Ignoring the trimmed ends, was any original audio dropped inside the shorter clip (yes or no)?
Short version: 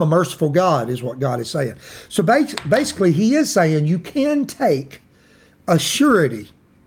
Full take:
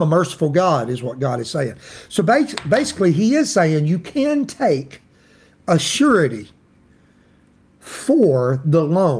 no